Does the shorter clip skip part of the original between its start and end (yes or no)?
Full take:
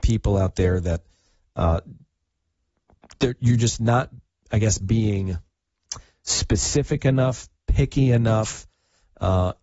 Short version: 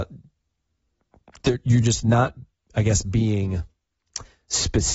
no